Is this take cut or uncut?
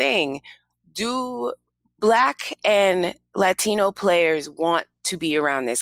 uncut